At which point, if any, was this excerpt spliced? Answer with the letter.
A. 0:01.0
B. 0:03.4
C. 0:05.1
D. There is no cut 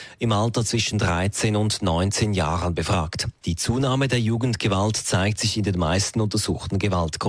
B